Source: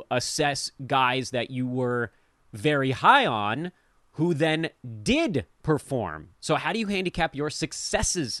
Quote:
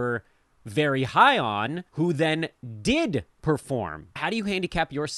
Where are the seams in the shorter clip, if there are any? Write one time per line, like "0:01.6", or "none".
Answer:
0:01.9
0:04.2